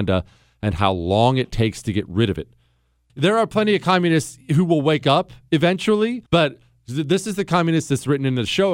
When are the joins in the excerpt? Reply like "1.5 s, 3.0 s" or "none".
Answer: 3.1 s, 6.3 s

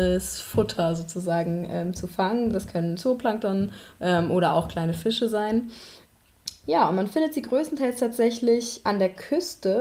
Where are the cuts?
none

